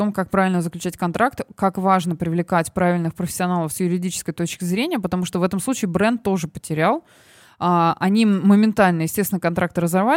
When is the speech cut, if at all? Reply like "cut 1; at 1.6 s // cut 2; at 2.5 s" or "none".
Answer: none